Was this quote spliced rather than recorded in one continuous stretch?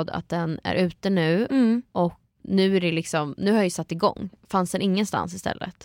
yes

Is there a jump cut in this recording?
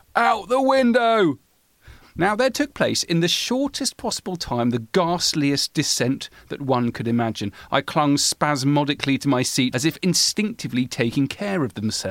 yes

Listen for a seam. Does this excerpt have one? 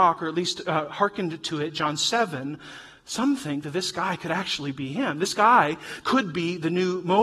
yes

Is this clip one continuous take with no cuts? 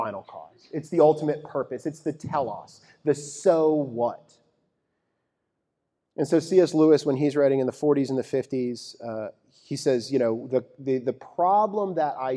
yes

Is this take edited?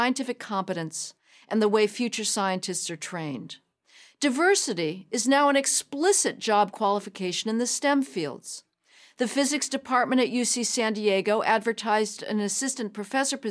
no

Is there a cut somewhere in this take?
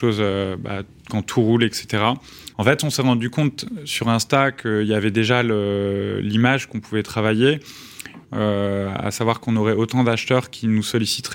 yes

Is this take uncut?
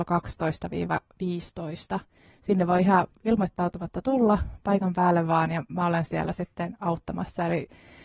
yes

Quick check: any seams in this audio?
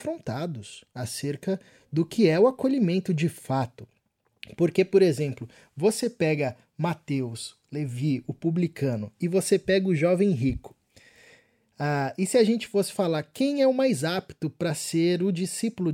no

